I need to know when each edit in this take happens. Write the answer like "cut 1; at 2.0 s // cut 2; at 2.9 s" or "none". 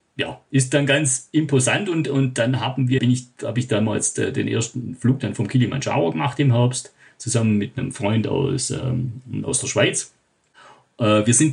cut 1; at 3.0 s

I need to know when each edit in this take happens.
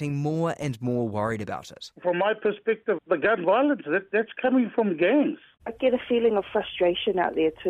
cut 1; at 3.0 s

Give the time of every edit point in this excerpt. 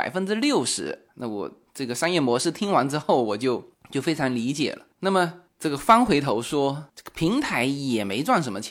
cut 1; at 1.1 s

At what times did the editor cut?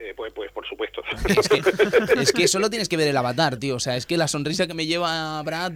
none

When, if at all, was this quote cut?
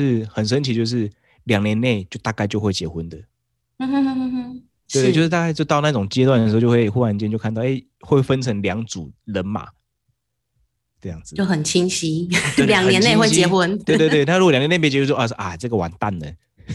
none

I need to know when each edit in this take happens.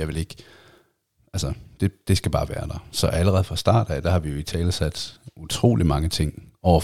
none

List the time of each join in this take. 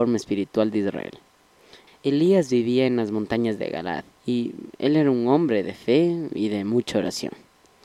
cut 1; at 1.9 s // cut 2; at 4.1 s

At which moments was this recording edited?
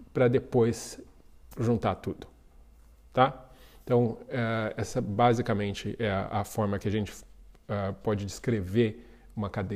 none

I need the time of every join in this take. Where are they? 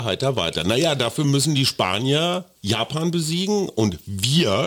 cut 1; at 2.6 s

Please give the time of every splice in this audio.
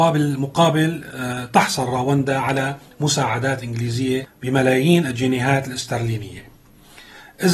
none

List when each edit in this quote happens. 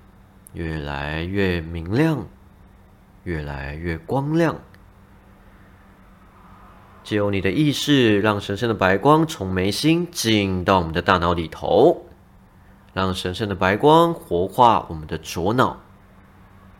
none

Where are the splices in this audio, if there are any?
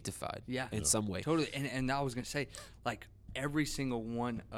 cut 1; at 3.3 s

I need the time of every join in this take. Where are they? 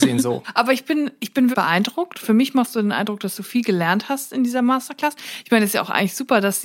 cut 1; at 1.5 s

